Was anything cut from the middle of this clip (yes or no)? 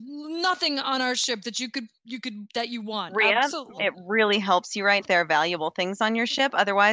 yes